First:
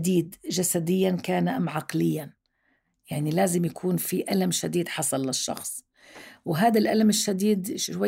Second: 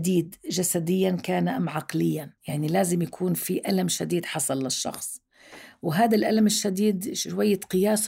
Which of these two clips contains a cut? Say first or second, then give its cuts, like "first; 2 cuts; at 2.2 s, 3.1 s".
second; 1 cut; at 2.4 s